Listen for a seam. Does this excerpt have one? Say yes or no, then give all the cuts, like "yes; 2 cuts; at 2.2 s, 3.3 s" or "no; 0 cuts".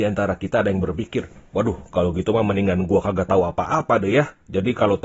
no; 0 cuts